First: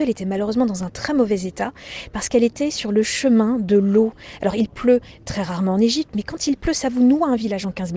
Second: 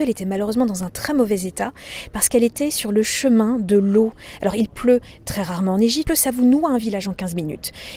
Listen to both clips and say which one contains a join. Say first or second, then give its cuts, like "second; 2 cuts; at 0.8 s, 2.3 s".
second; 1 cut; at 6.1 s